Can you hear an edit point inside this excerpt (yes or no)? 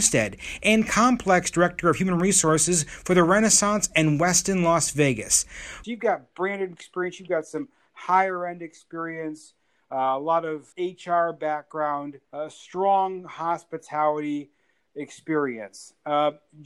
yes